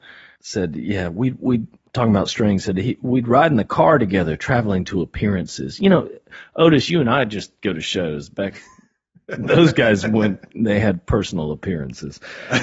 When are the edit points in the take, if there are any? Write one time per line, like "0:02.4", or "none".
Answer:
none